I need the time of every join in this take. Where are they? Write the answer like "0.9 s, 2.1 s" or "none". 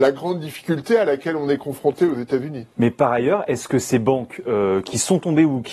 none

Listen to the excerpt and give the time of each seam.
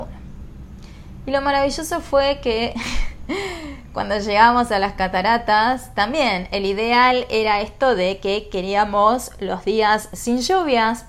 none

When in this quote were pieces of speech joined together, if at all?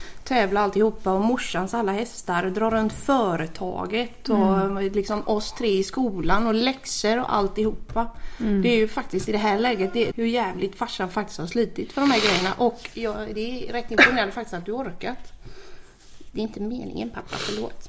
10.1 s

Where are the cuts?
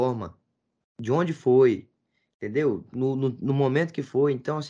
none

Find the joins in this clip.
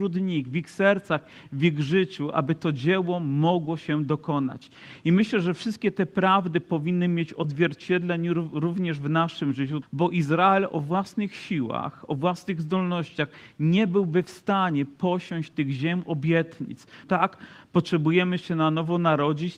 9.8 s, 17.0 s

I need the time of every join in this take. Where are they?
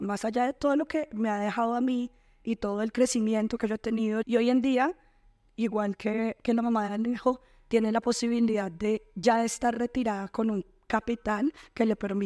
4.2 s

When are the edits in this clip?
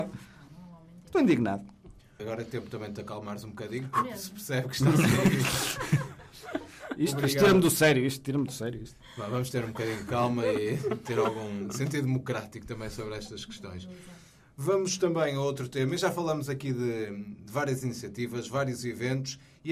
2.2 s

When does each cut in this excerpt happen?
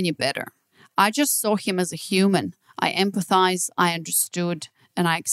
none

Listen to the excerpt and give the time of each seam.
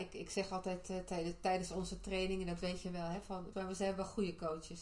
3.5 s

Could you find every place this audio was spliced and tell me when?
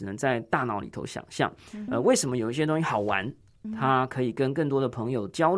1.9 s, 3.6 s

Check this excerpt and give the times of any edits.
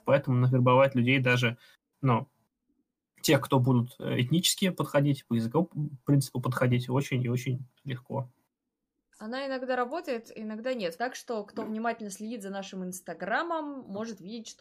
9.0 s, 11.0 s

